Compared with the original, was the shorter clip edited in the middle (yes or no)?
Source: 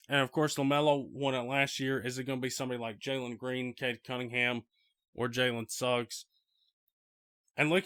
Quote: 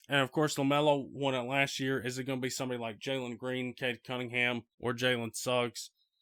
yes